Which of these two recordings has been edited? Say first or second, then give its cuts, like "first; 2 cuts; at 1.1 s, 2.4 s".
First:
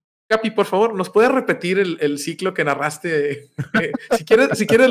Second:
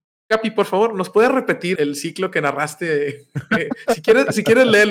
second; 1 cut; at 1.7 s